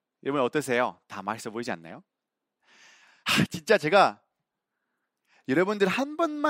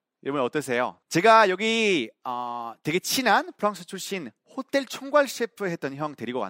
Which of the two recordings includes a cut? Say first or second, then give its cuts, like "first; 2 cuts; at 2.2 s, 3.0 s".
second; 1 cut; at 1.0 s